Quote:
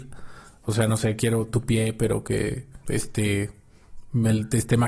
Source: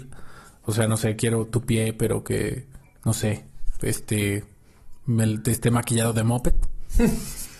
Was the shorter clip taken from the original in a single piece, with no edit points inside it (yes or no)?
no